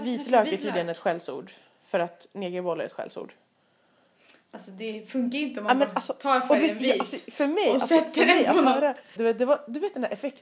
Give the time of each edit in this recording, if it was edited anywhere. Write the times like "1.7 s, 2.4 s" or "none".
9.2 s

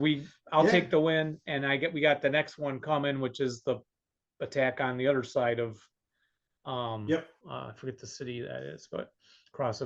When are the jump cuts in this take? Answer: 7.4 s

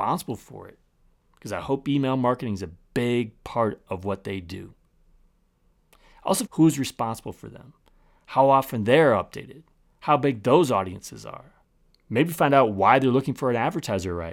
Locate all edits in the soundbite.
6.5 s

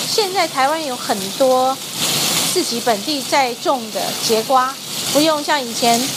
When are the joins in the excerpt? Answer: 3.2 s, 5.1 s

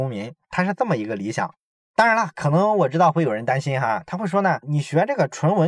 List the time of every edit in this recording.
none

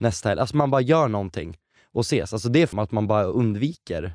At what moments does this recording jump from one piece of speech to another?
2.7 s

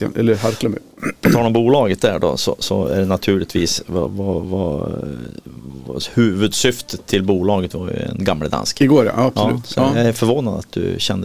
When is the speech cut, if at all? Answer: none

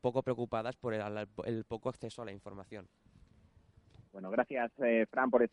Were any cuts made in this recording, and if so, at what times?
4.1 s

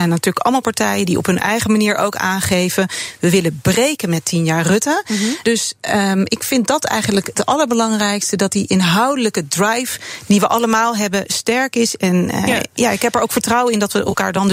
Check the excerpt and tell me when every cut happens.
5.4 s

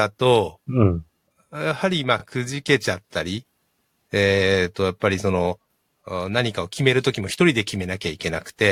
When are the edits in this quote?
none

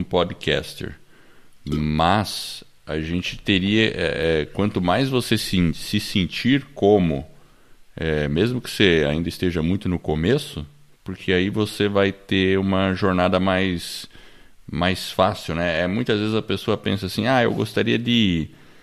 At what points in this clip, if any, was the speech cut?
11.0 s

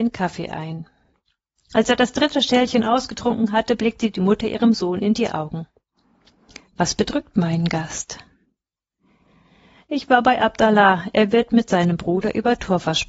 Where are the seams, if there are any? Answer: 6.7 s

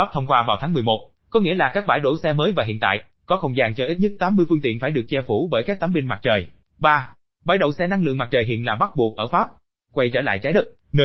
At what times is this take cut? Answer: 6.6 s

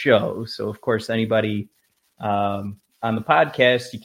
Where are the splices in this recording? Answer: none

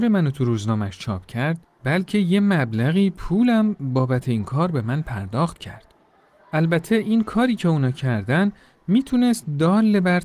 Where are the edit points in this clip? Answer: none

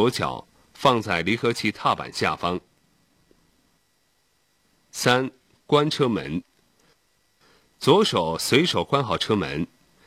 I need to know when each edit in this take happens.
none

